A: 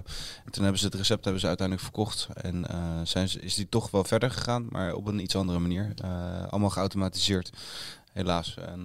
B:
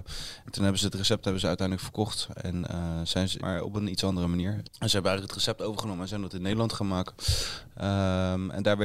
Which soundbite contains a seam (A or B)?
B